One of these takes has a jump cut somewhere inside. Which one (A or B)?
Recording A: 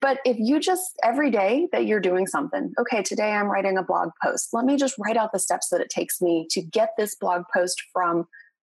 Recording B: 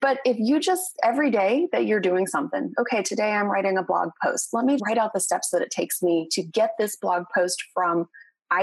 B